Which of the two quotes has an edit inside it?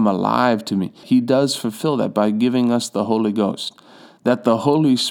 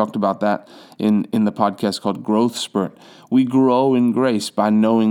first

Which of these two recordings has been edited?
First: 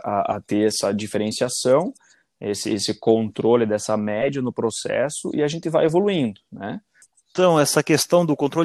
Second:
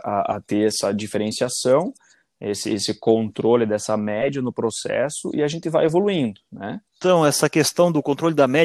second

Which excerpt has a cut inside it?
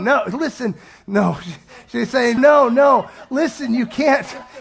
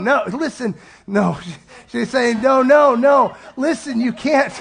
first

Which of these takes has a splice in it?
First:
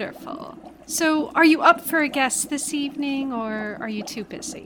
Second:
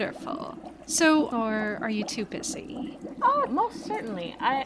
second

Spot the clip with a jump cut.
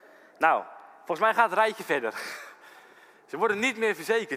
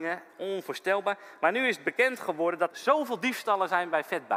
second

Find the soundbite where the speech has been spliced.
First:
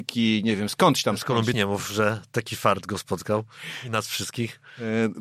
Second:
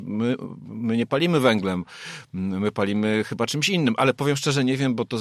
first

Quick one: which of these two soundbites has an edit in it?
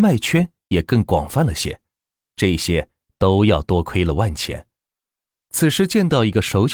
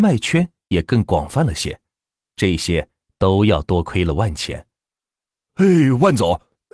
second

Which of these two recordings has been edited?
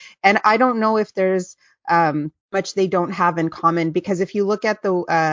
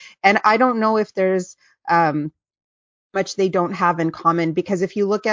first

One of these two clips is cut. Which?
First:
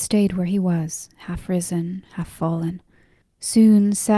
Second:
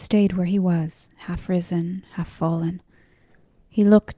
first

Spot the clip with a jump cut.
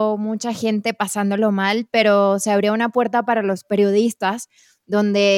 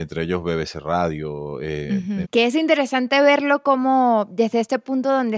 second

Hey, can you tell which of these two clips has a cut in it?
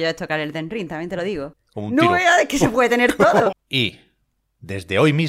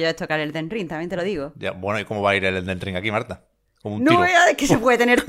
first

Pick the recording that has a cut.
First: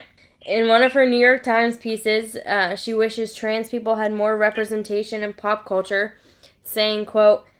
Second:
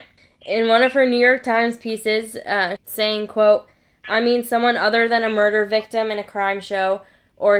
second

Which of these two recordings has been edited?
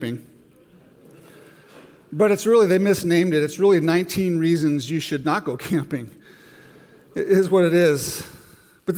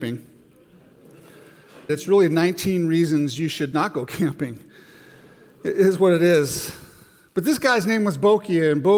second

